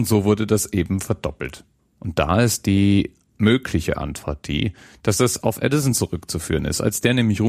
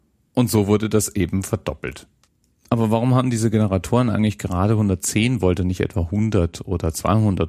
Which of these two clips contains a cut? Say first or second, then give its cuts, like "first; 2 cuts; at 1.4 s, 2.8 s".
first; 1 cut; at 1.8 s